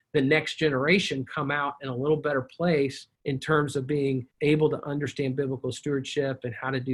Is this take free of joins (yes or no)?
no